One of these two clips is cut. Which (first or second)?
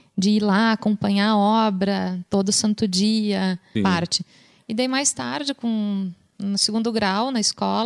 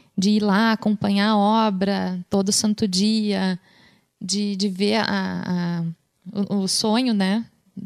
first